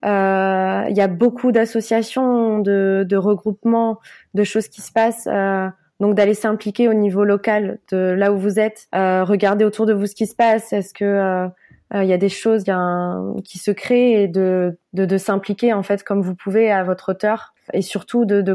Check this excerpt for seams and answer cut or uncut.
uncut